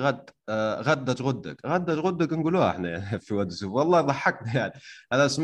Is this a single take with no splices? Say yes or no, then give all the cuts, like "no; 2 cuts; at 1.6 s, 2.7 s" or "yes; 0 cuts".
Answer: no; 1 cut; at 3.2 s